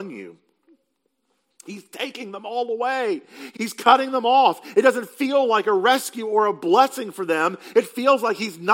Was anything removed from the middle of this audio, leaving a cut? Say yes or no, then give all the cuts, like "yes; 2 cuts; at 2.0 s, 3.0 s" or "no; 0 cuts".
yes; 1 cut; at 3.5 s